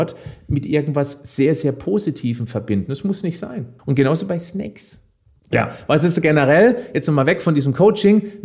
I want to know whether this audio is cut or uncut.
cut